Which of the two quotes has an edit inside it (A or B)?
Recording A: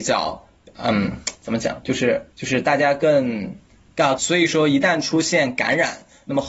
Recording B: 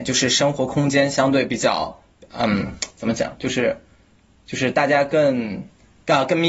A